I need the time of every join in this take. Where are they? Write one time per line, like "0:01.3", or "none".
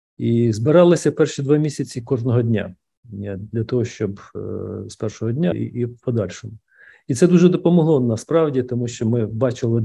0:05.5